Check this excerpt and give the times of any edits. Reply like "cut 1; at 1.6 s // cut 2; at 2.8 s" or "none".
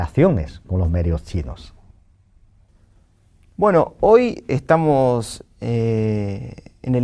none